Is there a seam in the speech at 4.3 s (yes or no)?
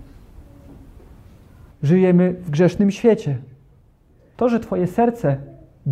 yes